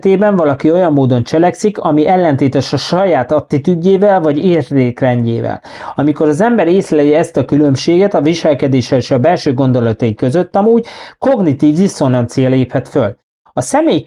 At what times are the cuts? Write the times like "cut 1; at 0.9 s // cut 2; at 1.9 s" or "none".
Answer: none